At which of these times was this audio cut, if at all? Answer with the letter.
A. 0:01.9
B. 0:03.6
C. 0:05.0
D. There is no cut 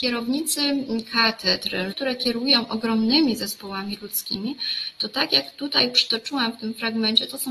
A